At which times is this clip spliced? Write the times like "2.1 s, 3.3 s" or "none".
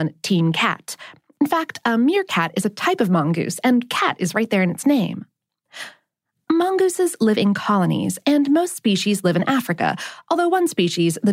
none